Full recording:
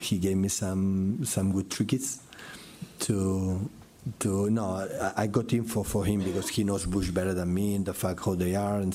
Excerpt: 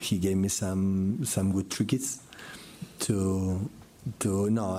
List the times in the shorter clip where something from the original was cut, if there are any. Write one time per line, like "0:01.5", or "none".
none